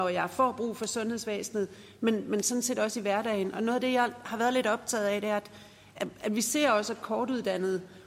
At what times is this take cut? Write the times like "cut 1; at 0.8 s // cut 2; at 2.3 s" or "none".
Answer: none